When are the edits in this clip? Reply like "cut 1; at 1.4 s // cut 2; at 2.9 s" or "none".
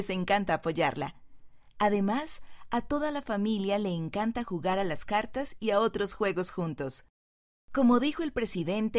none